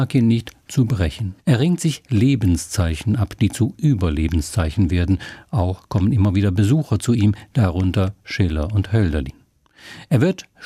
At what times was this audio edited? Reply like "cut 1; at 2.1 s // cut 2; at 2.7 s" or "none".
cut 1; at 1.4 s